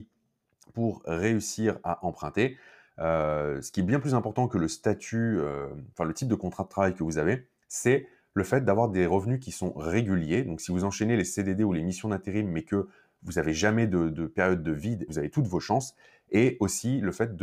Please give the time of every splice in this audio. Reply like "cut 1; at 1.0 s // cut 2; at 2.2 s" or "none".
cut 1; at 15.1 s

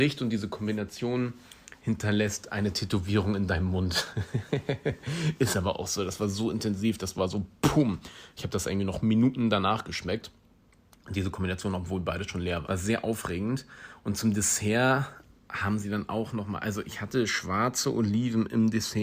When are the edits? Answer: cut 1; at 12.6 s

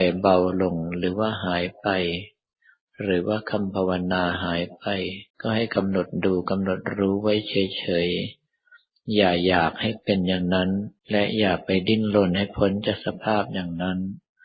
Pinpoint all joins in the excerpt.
cut 1; at 5.3 s // cut 2; at 11.0 s

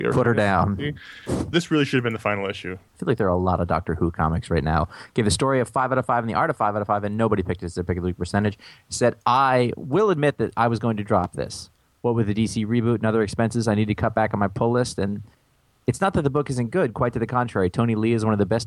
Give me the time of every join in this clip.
cut 1; at 2.9 s

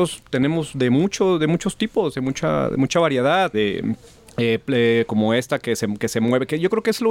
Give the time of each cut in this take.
cut 1; at 3.5 s // cut 2; at 5.1 s

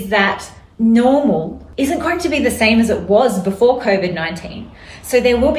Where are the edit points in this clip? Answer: none

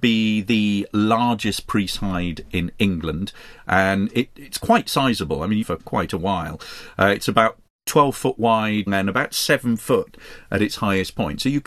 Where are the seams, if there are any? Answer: cut 1; at 5.6 s // cut 2; at 8.9 s

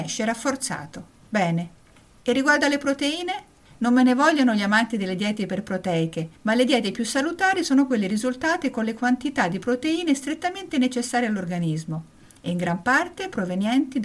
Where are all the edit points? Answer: none

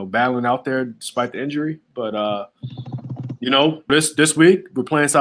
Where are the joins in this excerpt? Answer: cut 1; at 3.9 s

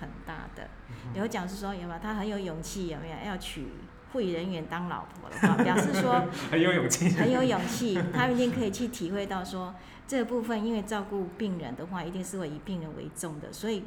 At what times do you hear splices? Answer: none

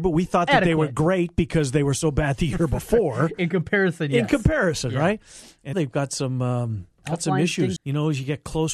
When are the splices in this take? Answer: cut 1; at 5.7 s // cut 2; at 7.8 s

